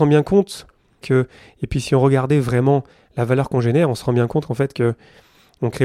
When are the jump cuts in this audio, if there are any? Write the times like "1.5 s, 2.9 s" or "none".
1.0 s